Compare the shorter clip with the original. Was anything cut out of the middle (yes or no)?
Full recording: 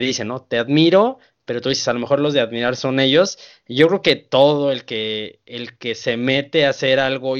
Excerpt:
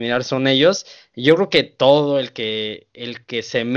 no